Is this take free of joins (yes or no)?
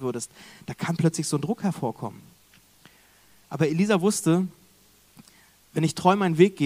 yes